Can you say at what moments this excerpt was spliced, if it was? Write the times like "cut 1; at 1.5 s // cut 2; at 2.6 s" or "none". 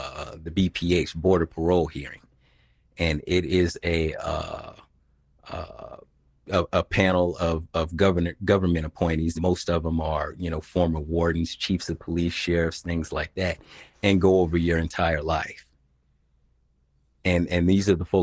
cut 1; at 9.4 s // cut 2; at 13.9 s